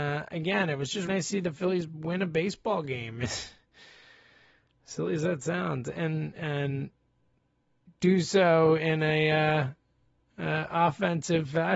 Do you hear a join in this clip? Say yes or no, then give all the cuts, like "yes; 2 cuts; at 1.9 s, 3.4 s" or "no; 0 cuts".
yes; 1 cut; at 1.1 s